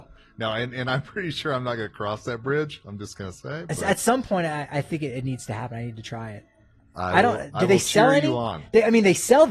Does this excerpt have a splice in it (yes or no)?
no